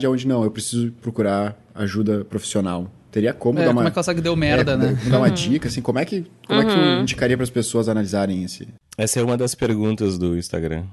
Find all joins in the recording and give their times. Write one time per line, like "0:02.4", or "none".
none